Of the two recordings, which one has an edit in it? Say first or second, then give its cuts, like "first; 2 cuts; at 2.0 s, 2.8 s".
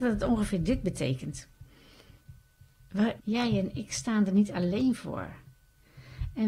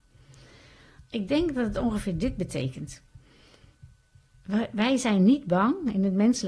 first; 1 cut; at 3.2 s